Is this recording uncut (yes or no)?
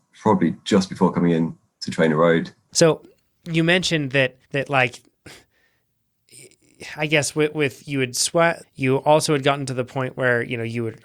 no